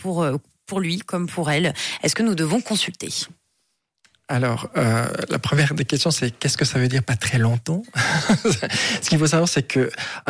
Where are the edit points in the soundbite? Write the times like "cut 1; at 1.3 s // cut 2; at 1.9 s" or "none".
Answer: none